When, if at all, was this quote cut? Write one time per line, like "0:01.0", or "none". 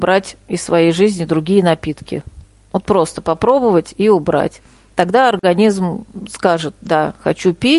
none